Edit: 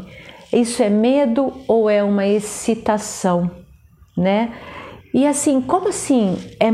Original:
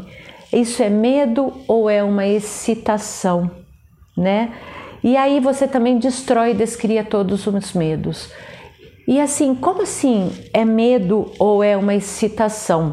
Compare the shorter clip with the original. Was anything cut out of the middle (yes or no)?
yes